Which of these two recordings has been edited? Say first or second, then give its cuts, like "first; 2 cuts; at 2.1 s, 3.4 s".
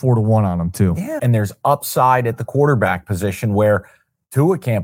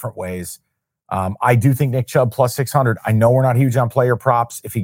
first; 1 cut; at 1.2 s